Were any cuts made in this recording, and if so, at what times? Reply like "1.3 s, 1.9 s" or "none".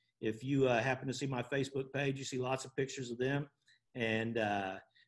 none

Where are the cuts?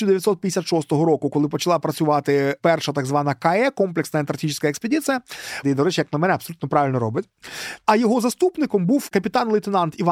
5.6 s

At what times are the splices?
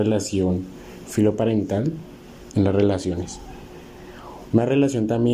2.5 s

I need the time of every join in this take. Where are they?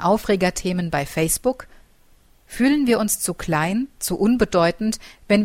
none

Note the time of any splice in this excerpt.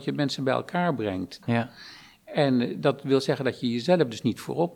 1.4 s

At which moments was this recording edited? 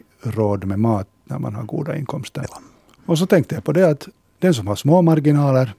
2.4 s

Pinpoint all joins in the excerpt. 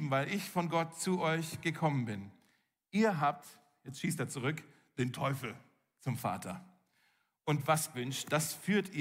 7.9 s

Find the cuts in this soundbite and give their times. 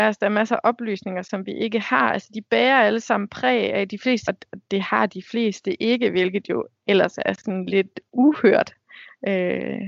4.3 s

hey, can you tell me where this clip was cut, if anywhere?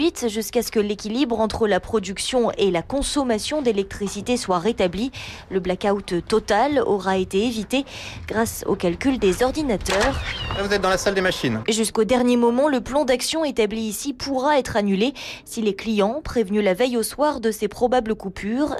11.6 s

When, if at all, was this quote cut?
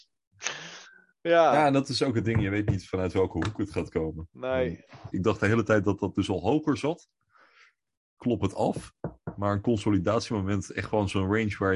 5.1 s

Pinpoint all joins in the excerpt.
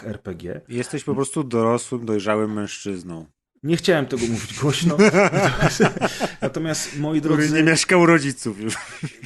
none

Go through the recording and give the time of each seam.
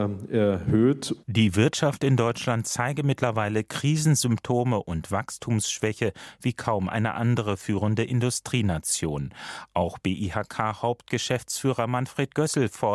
1.2 s

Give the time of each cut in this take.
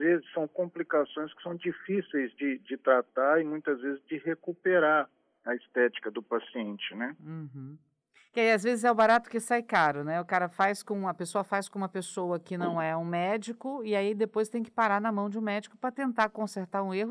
none

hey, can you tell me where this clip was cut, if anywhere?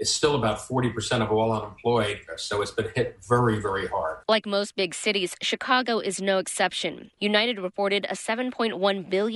4.2 s, 7.1 s

